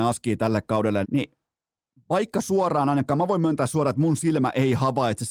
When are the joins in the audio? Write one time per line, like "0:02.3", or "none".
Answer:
0:01.0